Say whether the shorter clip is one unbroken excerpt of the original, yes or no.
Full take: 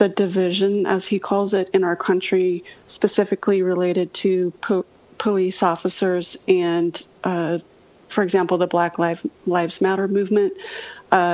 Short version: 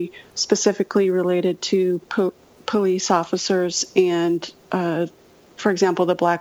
yes